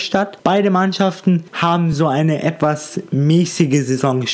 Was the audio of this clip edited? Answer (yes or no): no